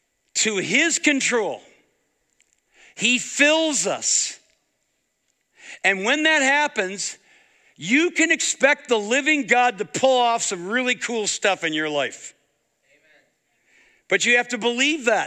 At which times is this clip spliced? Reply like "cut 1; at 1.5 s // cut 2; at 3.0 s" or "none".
none